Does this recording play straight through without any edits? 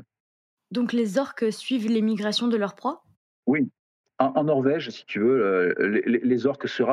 yes; 0 cuts

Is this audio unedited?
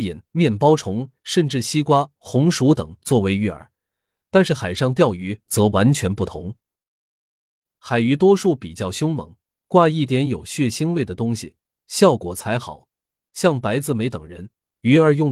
yes; 0 cuts

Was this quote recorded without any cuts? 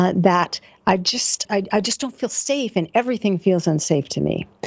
no; 1 cut; at 1.5 s

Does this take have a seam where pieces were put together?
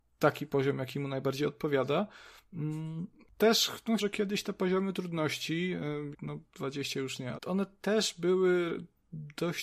yes; 3 cuts; at 4.0 s, 6.1 s, 7.4 s

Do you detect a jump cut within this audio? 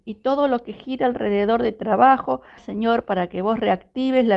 yes; 1 cut; at 2.6 s

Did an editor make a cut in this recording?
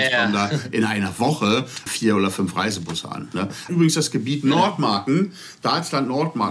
yes; 2 cuts; at 1.9 s, 3.7 s

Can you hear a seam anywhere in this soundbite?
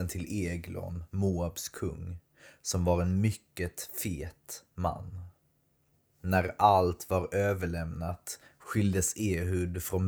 no; 0 cuts

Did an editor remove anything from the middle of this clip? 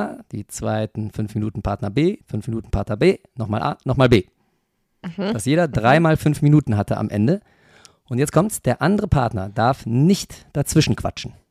yes; 1 cut; at 2.2 s

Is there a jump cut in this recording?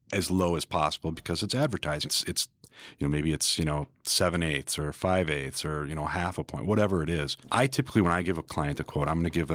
yes; 1 cut; at 2.1 s

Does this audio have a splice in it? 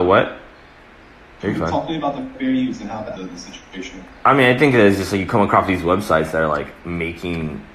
yes; 2 cuts; at 1.4 s, 3.2 s

